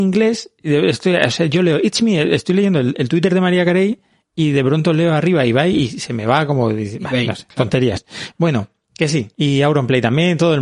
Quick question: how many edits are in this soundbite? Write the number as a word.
one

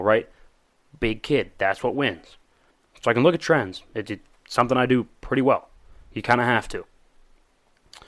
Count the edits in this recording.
zero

